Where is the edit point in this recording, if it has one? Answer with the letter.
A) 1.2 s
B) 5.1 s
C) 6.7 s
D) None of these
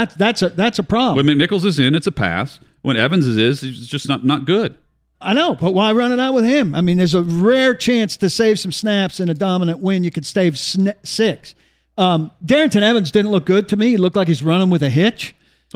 B